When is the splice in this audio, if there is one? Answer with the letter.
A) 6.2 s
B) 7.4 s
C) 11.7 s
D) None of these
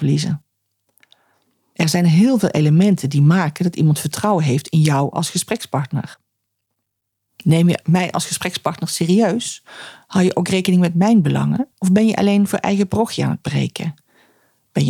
C